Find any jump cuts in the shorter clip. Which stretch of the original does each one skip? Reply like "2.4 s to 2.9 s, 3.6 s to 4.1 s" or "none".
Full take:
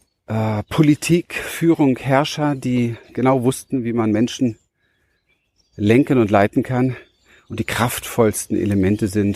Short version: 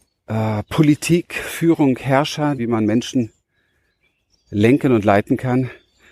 2.6 s to 3.8 s